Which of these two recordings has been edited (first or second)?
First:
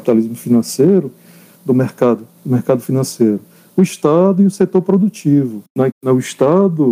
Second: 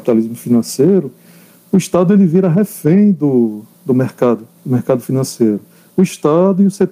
first